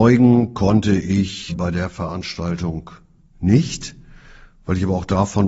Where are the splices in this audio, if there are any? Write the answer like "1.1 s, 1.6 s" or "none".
1.5 s